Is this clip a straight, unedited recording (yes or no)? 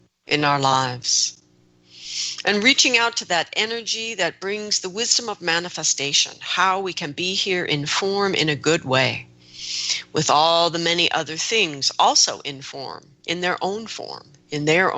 yes